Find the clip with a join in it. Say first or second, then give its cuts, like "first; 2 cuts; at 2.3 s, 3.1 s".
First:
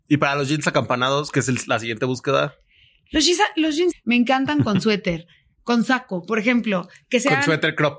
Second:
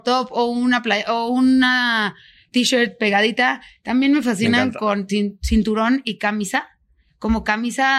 first; 1 cut; at 3.9 s